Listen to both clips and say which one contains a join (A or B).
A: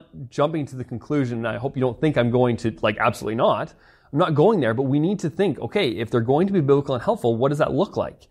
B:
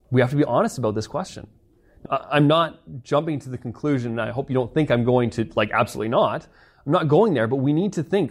B